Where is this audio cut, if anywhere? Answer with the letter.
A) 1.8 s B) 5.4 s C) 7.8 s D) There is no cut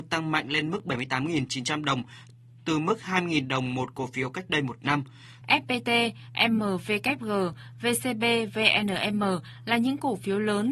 B